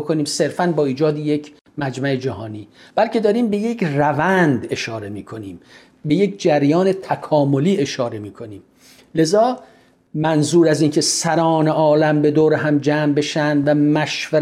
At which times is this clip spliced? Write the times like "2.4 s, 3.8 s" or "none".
none